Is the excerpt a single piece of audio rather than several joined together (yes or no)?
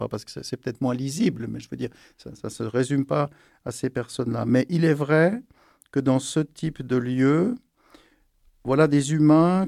yes